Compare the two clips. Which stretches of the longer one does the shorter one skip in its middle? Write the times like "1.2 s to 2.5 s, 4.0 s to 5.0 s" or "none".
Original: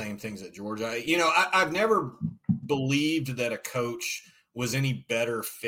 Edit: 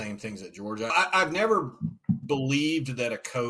0.9 s to 1.3 s